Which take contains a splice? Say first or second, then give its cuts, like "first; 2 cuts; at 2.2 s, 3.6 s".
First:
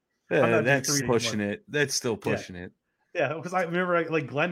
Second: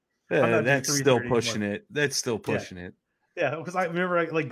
first; 1 cut; at 1.0 s